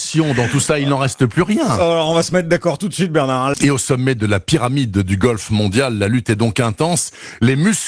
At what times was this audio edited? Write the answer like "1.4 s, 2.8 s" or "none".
3.5 s

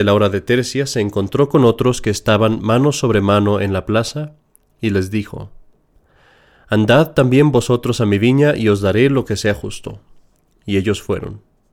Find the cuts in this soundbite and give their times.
none

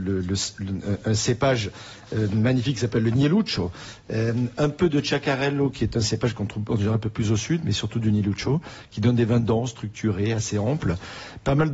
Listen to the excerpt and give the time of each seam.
none

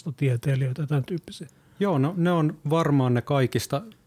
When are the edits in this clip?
none

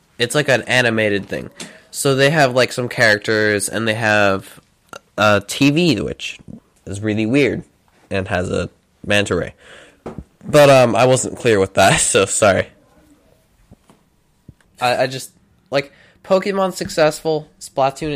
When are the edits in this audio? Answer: none

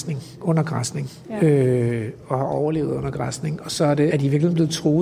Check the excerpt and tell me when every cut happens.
4.1 s

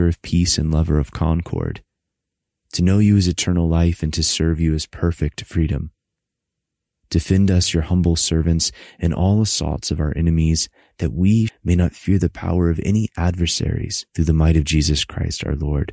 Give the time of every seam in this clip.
11.5 s, 14.1 s

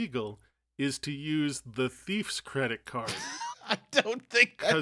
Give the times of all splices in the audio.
3.5 s

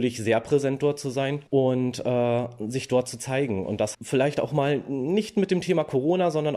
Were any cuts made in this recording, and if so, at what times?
1.5 s, 3.9 s

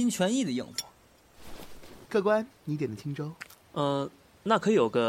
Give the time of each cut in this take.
2.1 s, 3.6 s

